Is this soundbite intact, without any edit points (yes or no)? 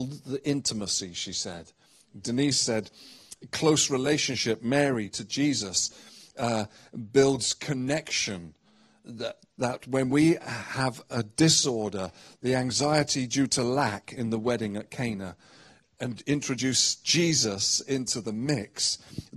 no